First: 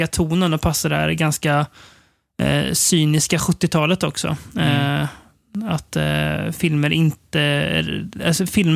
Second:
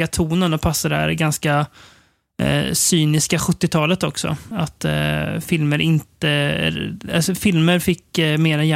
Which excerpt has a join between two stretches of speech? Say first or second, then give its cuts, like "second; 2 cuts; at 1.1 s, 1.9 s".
second; 1 cut; at 4.5 s